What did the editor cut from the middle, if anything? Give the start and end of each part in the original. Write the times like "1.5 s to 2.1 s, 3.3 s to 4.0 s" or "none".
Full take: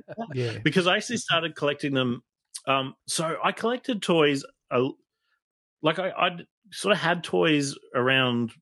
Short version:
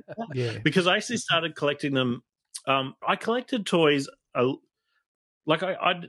3.0 s to 3.4 s